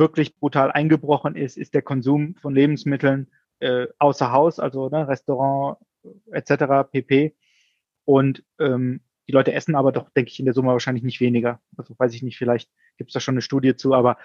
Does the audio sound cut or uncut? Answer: cut